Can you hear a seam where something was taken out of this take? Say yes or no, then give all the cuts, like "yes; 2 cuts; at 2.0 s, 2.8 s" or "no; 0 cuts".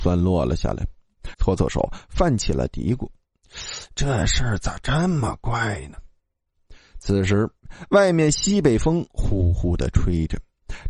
yes; 1 cut; at 1.3 s